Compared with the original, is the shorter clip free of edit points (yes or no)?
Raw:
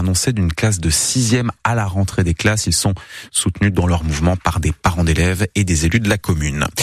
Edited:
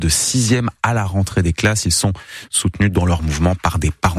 yes